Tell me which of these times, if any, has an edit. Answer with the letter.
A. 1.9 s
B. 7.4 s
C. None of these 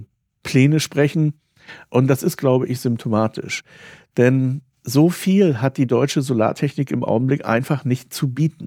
A